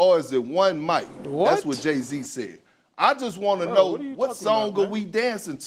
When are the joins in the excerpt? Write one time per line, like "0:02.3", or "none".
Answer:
none